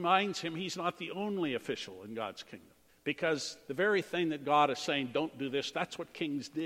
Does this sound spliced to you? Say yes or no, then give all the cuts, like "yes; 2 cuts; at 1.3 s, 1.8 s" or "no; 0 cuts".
yes; 2 cuts; at 2.9 s, 5.7 s